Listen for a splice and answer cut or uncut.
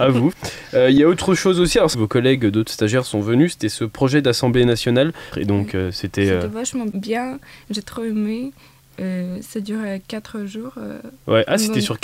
cut